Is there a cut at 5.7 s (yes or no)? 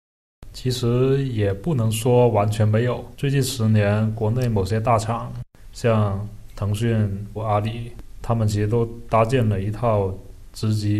no